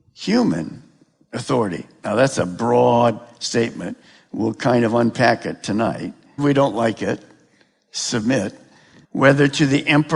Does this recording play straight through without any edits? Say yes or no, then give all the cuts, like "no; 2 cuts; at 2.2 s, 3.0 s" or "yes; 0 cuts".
no; 2 cuts; at 6.4 s, 9.0 s